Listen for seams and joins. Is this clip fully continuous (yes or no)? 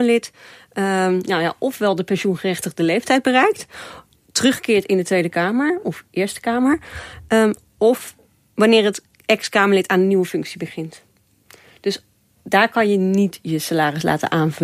yes